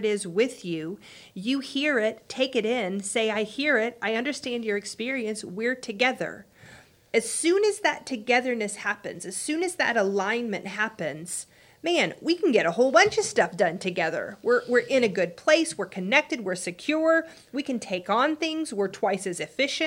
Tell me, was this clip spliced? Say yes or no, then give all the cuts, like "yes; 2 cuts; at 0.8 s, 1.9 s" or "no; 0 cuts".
no; 0 cuts